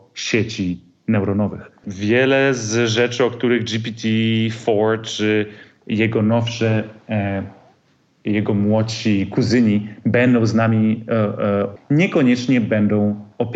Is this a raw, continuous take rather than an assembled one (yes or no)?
no